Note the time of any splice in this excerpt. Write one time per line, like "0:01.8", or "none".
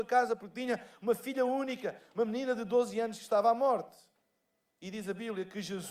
none